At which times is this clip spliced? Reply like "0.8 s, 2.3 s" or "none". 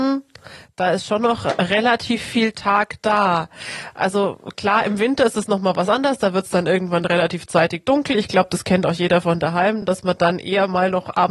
none